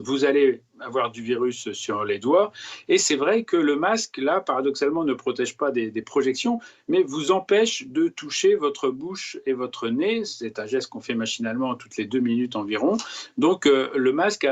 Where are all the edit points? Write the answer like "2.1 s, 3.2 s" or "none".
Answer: none

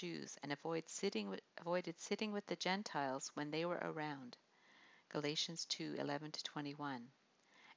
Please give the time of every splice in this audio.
1.5 s

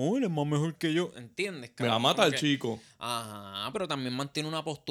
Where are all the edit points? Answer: 3.7 s

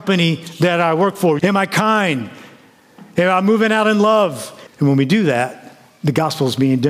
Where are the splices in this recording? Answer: 1.4 s, 4.7 s

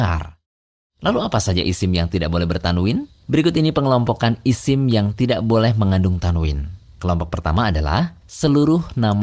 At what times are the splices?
none

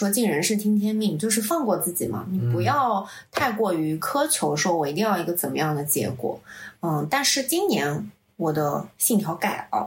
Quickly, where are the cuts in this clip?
none

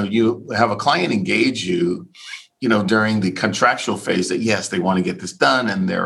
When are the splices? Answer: 2.5 s

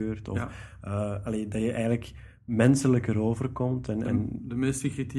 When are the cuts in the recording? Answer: none

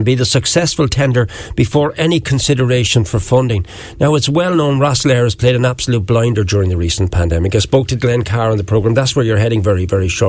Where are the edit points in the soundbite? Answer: none

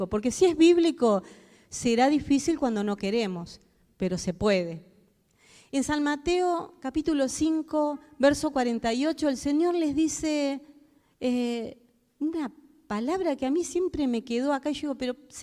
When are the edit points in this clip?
none

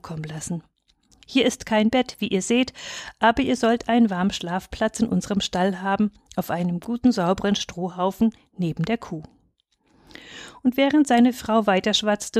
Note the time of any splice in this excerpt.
none

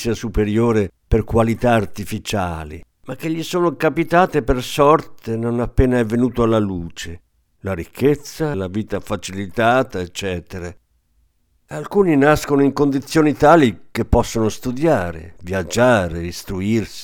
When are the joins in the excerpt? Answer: 2.9 s, 8.5 s, 11.6 s

